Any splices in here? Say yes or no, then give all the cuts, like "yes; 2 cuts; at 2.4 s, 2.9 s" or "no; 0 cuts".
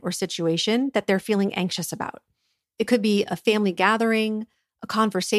no; 0 cuts